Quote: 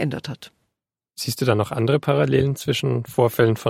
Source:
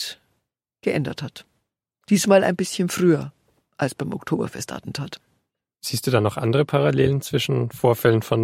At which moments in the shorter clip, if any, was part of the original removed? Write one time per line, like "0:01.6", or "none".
0:01.1